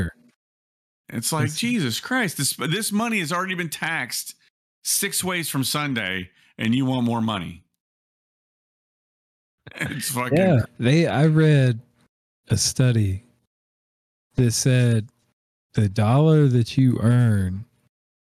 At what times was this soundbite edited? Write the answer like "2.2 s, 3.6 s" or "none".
1.0 s, 10.7 s